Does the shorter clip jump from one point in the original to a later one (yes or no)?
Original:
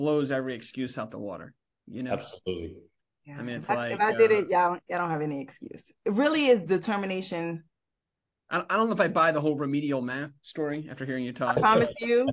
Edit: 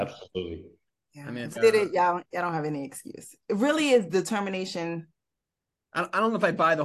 yes